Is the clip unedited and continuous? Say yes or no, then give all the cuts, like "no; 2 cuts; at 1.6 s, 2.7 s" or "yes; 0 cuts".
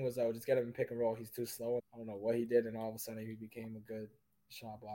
no; 1 cut; at 1.8 s